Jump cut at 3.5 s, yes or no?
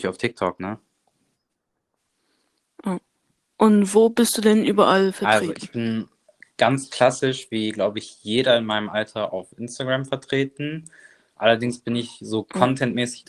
yes